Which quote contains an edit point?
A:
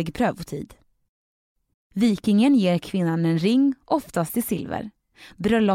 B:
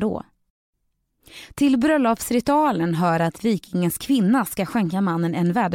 A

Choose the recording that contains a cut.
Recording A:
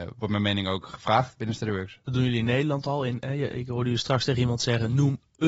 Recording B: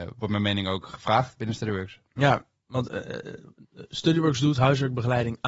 A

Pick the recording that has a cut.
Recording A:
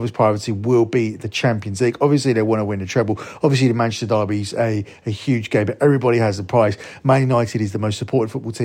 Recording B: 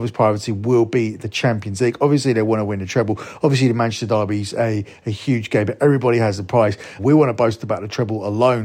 B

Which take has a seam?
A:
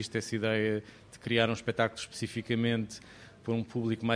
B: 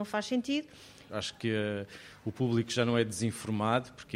B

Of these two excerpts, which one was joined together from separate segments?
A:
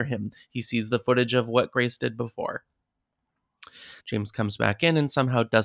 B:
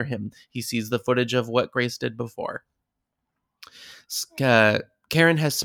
A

